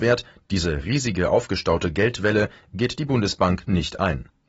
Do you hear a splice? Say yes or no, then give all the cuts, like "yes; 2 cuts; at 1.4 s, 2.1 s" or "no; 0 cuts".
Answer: no; 0 cuts